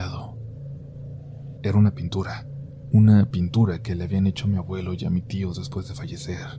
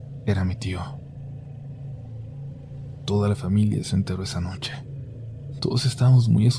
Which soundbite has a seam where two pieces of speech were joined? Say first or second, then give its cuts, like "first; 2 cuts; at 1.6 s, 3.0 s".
first; 1 cut; at 1.6 s